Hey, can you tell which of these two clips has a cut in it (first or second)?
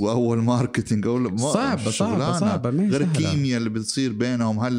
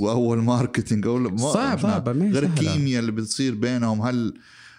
second